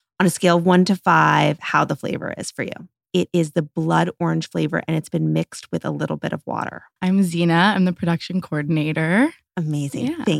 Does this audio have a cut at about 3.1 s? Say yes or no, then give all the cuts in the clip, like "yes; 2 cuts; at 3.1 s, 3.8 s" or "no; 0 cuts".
yes; 3 cuts; at 3.1 s, 7.0 s, 9.5 s